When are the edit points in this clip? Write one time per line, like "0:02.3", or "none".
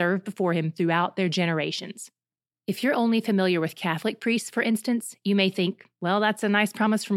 none